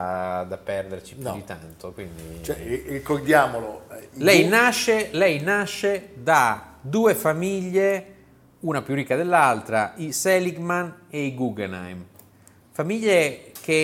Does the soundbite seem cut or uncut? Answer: uncut